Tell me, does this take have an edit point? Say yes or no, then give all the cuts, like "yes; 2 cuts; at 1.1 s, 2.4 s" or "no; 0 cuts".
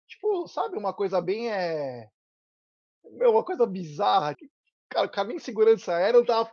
yes; 1 cut; at 4.3 s